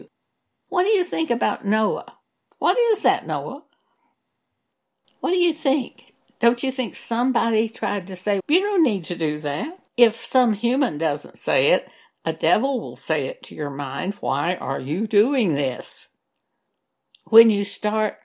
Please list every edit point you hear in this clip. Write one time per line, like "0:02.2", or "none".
0:02.5
0:08.4
0:09.9